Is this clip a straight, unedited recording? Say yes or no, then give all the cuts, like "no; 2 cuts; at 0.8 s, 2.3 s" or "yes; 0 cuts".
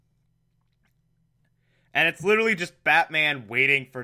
yes; 0 cuts